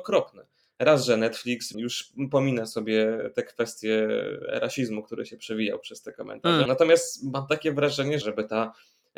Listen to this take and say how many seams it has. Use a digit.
3